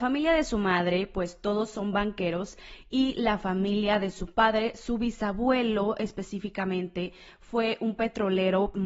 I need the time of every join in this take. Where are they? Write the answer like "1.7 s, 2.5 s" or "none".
none